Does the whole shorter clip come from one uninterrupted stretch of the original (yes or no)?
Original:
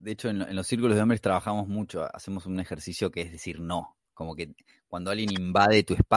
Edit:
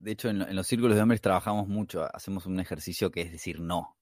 yes